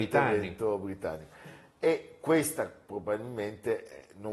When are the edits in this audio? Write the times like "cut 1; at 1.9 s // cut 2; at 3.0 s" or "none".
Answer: cut 1; at 2.8 s